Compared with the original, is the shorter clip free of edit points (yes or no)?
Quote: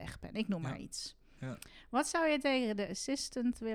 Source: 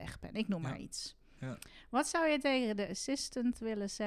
yes